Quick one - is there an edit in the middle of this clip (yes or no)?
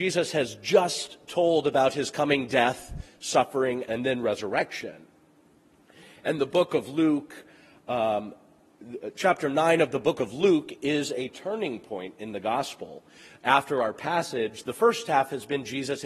no